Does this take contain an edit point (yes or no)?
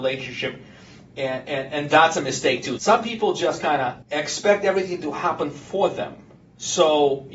yes